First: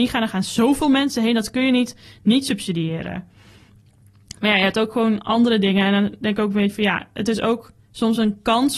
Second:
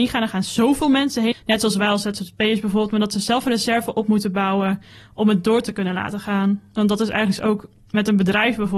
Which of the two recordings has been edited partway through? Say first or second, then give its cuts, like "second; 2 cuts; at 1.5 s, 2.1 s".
second; 1 cut; at 1.3 s